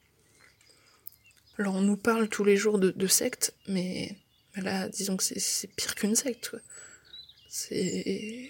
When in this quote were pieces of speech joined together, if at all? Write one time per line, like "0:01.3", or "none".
0:01.5